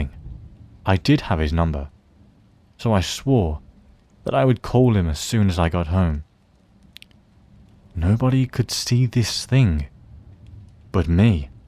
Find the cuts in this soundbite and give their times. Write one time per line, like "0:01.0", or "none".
none